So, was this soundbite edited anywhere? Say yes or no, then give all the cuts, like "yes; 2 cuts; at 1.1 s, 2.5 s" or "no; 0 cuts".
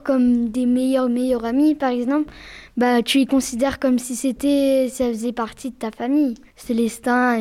yes; 1 cut; at 6.5 s